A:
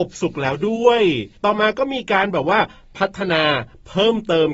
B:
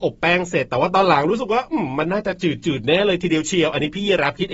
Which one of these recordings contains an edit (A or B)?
A